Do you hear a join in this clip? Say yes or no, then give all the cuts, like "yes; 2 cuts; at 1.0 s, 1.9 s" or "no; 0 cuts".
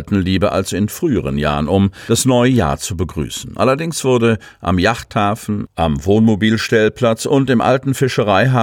no; 0 cuts